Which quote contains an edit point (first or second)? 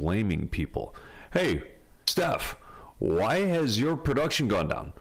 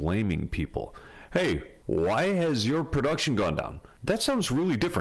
second